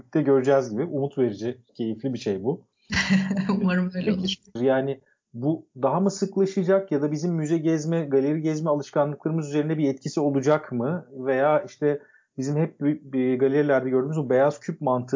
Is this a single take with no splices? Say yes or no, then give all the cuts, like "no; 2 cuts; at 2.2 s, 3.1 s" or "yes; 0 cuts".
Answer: no; 1 cut; at 4.6 s